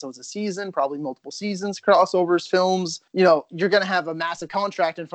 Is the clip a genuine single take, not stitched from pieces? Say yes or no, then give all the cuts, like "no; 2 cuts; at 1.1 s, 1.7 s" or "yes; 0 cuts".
no; 1 cut; at 3.1 s